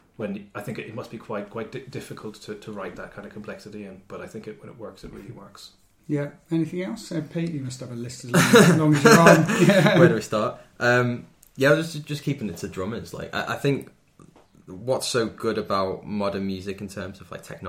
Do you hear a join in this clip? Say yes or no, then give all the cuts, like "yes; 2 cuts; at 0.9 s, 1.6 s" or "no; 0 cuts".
no; 0 cuts